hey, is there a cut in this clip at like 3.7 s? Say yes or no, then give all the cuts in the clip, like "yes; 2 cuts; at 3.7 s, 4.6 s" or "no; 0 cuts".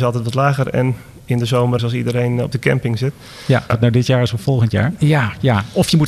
yes; 3 cuts; at 1.8 s, 3.7 s, 5.0 s